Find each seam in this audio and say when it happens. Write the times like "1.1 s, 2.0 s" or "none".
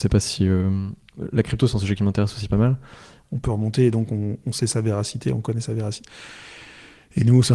3.2 s